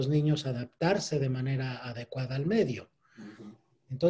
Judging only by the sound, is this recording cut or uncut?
uncut